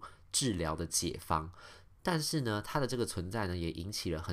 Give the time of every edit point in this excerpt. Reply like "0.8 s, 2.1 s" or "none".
none

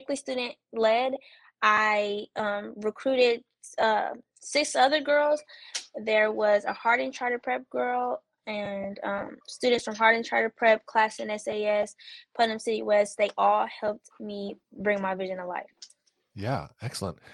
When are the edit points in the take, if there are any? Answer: 9.4 s

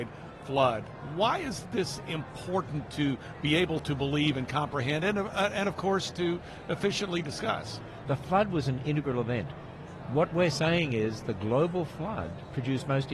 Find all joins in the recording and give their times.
8.0 s

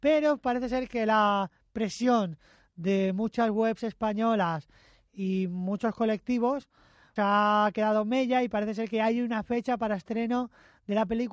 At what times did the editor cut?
7.2 s

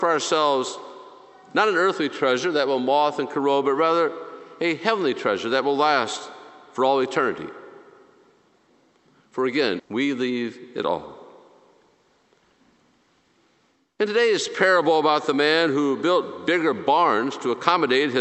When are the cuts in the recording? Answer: 9.8 s

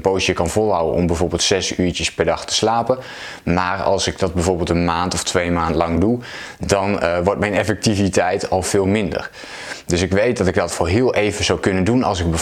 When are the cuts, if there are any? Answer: none

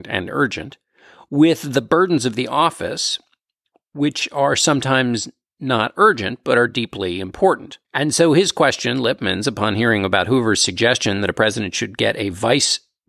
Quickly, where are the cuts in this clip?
7.8 s

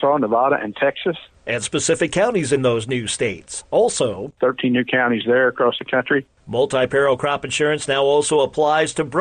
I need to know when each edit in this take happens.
4.4 s

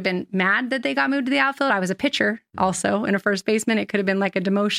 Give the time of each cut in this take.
none

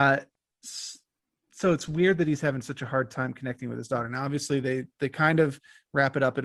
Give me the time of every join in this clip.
none

